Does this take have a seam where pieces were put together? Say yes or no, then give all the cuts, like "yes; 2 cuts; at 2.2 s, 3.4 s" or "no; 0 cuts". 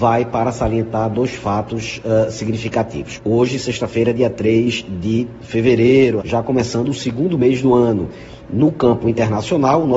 yes; 2 cuts; at 3.2 s, 6.2 s